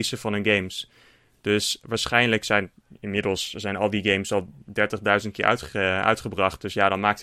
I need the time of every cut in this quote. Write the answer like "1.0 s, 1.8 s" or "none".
none